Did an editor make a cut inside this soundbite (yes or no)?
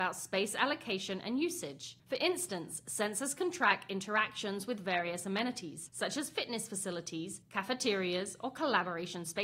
yes